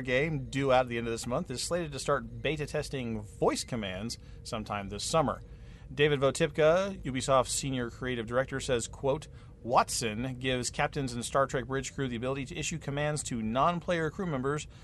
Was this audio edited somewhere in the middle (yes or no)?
no